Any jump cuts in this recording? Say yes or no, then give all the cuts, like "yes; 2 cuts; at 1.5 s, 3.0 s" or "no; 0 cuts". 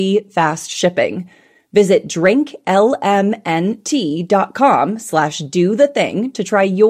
no; 0 cuts